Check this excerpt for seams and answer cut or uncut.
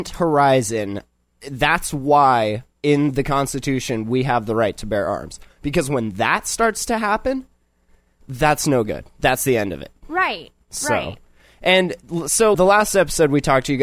cut